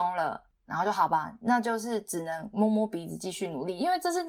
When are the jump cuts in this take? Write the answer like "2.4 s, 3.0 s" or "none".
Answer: none